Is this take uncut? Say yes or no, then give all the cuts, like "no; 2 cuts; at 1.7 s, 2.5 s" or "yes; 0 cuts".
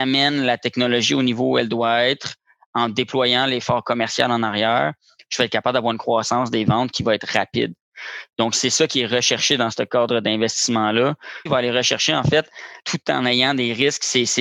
no; 3 cuts; at 8.3 s, 11.5 s, 12.8 s